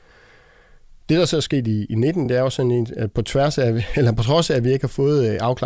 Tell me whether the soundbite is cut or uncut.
uncut